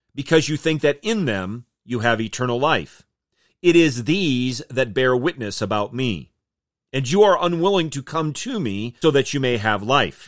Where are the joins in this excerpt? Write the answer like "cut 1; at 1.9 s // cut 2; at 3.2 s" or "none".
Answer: cut 1; at 9.0 s